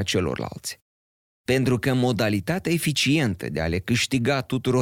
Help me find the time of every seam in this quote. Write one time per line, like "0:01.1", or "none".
0:01.3